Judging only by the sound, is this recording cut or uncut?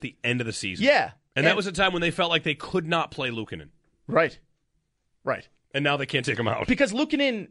uncut